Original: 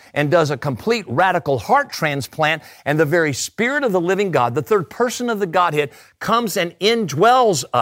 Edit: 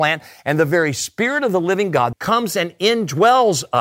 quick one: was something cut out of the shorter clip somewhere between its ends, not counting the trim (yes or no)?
yes